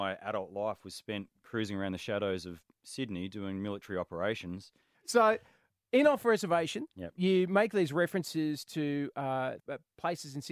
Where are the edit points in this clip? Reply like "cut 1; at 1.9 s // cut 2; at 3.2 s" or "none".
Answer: cut 1; at 4.9 s // cut 2; at 9.6 s